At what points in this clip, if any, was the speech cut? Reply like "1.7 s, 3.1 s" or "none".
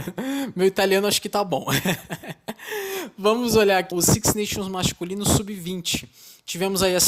3.9 s